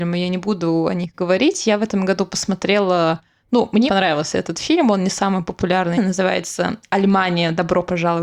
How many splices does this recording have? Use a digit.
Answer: 2